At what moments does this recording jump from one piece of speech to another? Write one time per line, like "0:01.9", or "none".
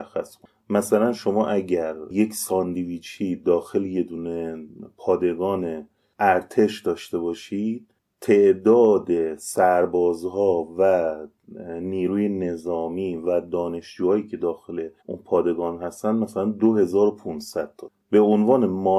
0:15.0